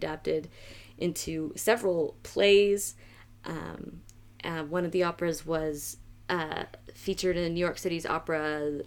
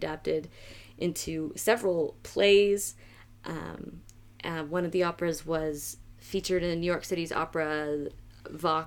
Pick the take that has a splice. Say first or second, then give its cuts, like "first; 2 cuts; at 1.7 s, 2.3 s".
second; 1 cut; at 6.2 s